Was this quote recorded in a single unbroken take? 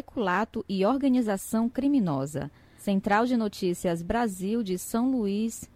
yes; 0 cuts

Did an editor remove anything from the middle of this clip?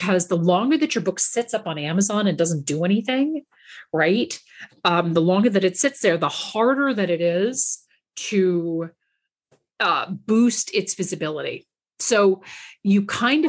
no; 0 cuts

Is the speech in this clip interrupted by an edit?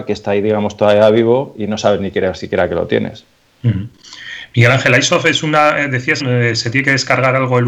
yes; 1 cut; at 6.2 s

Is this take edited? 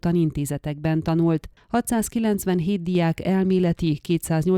no; 0 cuts

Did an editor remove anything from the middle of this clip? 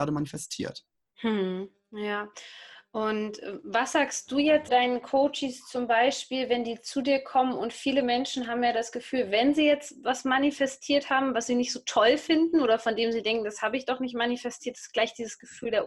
yes; 1 cut; at 4.7 s

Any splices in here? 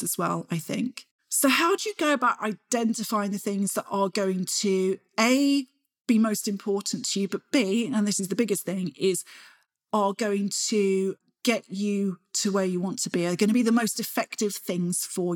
no; 0 cuts

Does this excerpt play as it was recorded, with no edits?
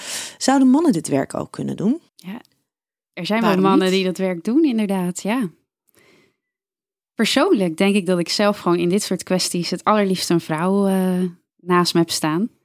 no; 1 cut; at 2.1 s

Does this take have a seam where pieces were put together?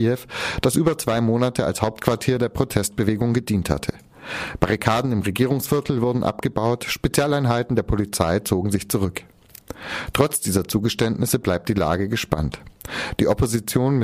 no; 0 cuts

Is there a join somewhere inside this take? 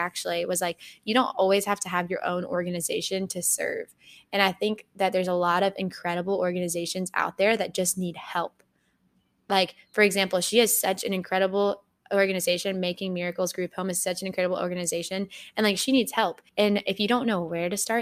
yes; 1 cut; at 16.5 s

